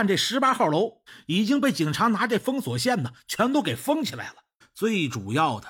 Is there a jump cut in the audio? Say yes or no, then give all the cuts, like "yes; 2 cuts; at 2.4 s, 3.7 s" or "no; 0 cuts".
yes; 1 cut; at 4.6 s